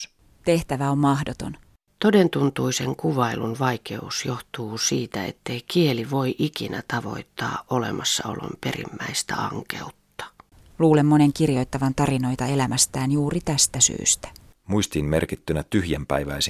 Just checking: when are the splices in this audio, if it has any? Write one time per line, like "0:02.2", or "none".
none

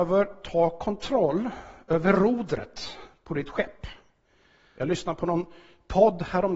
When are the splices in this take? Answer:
0:04.8

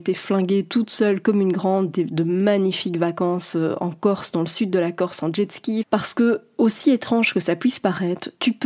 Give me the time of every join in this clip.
0:05.8

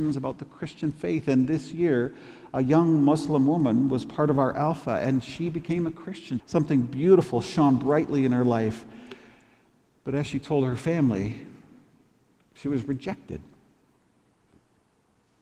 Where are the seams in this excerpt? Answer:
0:06.4

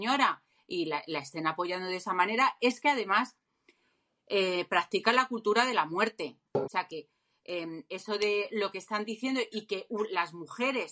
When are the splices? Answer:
0:06.6

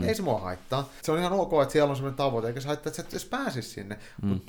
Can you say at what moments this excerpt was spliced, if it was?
0:01.0

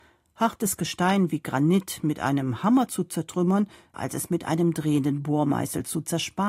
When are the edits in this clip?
0:03.9

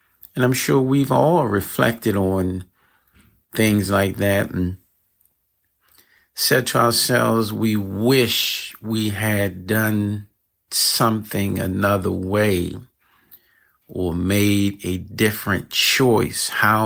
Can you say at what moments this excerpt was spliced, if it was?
none

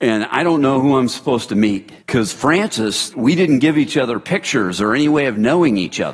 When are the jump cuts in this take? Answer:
0:02.0
0:03.1

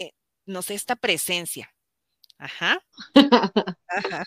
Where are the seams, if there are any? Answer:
0:02.9

